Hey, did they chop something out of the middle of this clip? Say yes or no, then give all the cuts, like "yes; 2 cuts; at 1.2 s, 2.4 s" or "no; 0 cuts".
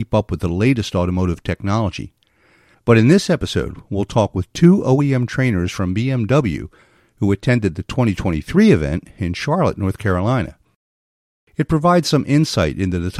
yes; 1 cut; at 2.7 s